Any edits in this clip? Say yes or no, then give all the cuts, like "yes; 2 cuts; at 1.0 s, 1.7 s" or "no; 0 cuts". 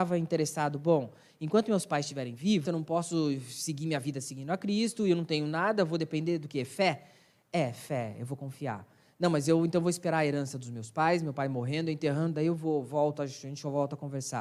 yes; 1 cut; at 2.6 s